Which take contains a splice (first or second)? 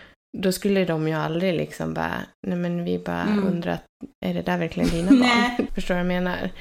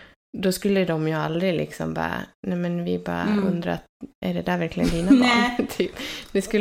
first